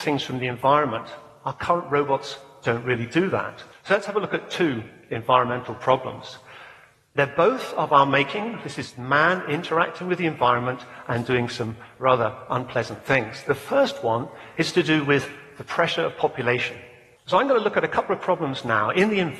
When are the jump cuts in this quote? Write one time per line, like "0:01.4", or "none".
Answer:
0:03.7
0:17.1